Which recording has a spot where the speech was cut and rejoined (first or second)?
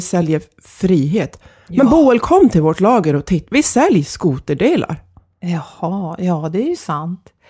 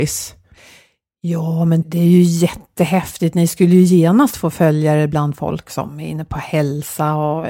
second